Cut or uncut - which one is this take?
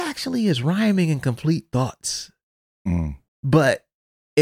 cut